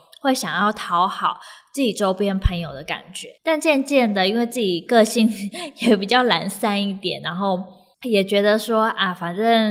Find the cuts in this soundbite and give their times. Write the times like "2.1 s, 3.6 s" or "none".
3.4 s